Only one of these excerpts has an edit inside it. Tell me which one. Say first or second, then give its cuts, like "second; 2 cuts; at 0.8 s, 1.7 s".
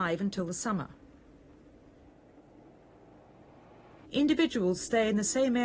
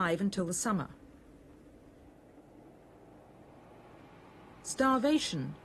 first; 1 cut; at 4.0 s